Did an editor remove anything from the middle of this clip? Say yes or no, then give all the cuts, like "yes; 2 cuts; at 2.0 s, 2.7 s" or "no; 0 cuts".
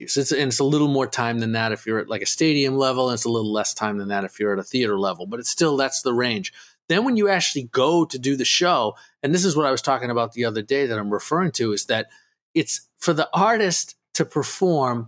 no; 0 cuts